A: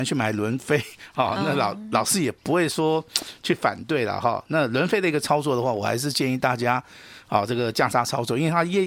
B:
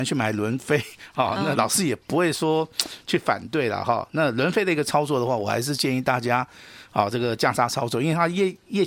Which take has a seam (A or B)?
B